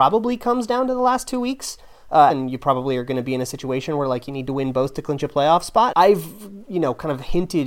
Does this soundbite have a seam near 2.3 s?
yes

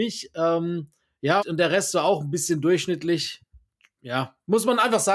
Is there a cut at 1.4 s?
yes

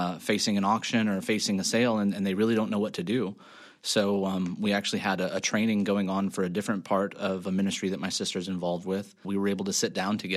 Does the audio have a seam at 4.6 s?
no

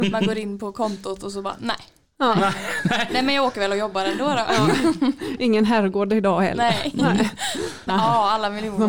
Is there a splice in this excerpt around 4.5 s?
no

